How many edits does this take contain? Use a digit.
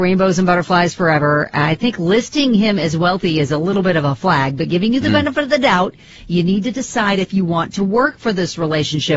0